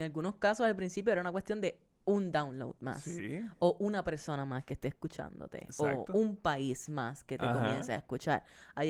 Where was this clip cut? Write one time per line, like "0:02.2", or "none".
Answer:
none